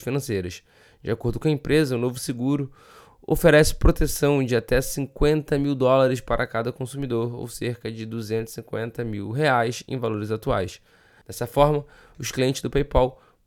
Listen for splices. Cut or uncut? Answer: cut